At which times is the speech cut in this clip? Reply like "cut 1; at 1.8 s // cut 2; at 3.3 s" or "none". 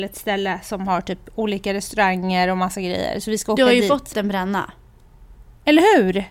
cut 1; at 4.1 s